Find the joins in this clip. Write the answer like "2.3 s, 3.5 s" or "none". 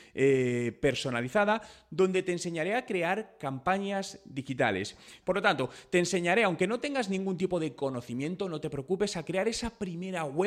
5.2 s